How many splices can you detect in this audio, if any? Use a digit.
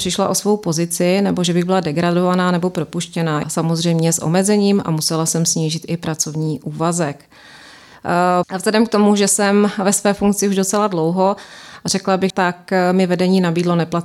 3